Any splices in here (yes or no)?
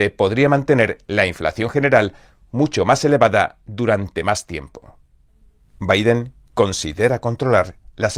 no